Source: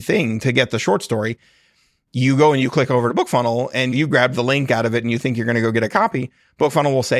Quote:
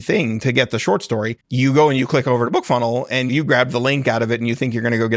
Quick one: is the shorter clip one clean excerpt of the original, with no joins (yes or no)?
no